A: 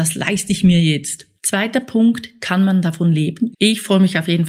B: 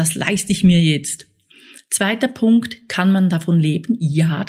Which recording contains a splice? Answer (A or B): A